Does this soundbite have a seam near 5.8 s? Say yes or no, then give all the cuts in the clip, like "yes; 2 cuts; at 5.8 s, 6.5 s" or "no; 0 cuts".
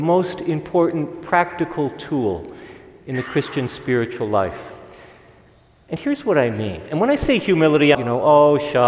no; 1 cut; at 7.9 s